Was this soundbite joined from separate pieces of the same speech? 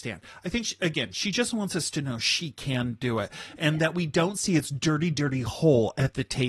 no; 0 cuts

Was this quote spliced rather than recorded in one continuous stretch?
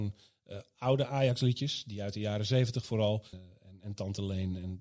yes; 1 cut; at 3.3 s

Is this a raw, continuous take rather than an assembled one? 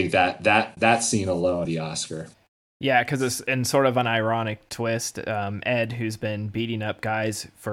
no; 1 cut; at 1.7 s

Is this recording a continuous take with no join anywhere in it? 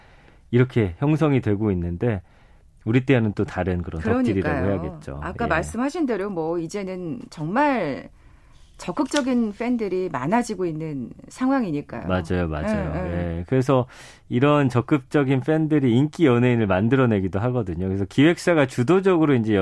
yes; 0 cuts

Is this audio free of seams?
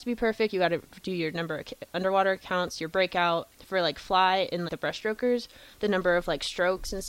no; 2 cuts; at 3.5 s, 4.7 s

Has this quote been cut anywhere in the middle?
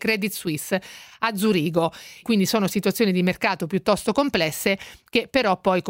yes; 1 cut; at 2.2 s

